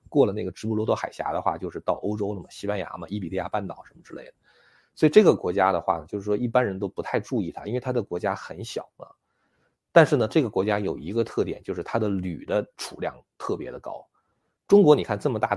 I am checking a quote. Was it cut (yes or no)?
no